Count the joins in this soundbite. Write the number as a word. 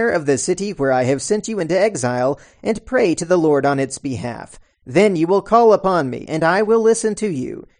two